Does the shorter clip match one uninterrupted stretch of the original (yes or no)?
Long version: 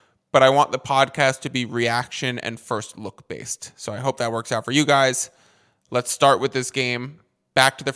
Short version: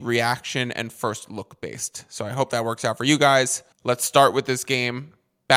no